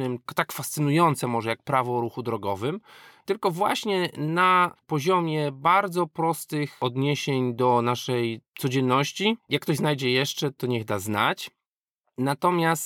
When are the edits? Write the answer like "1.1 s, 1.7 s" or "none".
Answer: 9.4 s